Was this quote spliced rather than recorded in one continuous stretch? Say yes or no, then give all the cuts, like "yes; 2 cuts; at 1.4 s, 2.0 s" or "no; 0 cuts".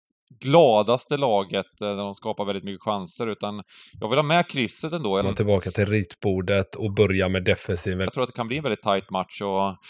yes; 2 cuts; at 5.2 s, 8.1 s